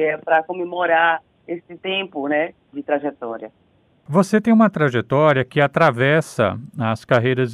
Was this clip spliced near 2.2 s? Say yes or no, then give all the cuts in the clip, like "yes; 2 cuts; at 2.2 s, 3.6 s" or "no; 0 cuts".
no; 0 cuts